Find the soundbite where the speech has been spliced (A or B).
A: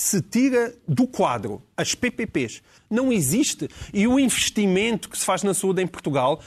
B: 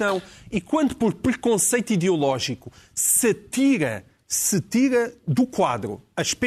A